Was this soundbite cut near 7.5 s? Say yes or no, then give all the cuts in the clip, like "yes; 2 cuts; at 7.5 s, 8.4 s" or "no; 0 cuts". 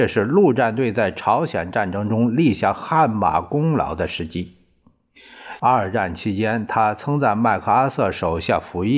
no; 1 cut; at 5.6 s